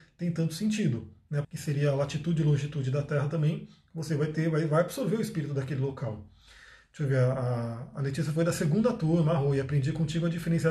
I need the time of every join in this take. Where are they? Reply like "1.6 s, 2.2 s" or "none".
1.4 s